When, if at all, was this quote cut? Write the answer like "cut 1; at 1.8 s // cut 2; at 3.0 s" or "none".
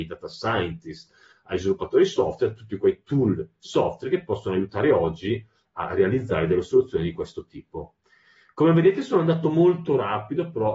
none